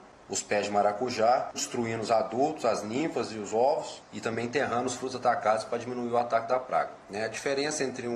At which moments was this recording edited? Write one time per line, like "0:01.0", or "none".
0:01.5
0:07.0